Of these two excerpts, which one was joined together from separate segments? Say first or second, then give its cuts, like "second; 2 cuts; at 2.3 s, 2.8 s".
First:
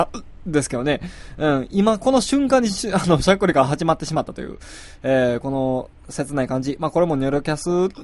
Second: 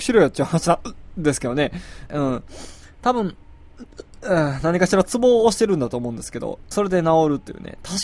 second; 2 cuts; at 2.1 s, 6.7 s